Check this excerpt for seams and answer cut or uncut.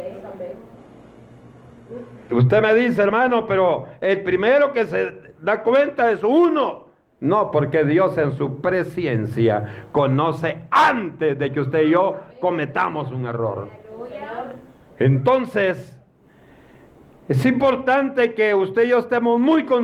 uncut